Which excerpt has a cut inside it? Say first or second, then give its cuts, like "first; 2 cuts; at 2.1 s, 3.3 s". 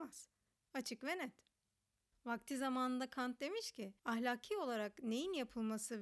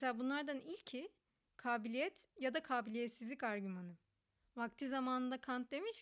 first; 2 cuts; at 2.1 s, 4.0 s